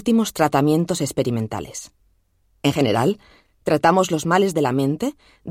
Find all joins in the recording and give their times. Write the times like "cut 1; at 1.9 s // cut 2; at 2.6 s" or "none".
none